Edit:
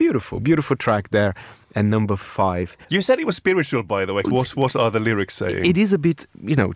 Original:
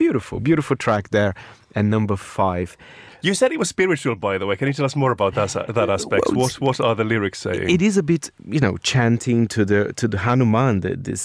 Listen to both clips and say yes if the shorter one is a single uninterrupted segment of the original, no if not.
no